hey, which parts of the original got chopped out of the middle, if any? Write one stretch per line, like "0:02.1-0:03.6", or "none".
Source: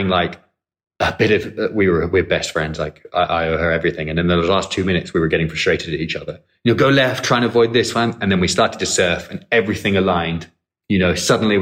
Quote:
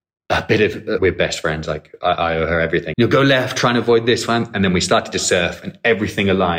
0:01.7-0:02.1
0:04.0-0:06.6